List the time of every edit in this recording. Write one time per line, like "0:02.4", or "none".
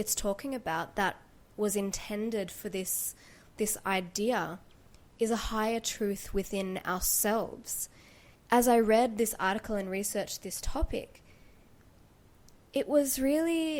0:08.3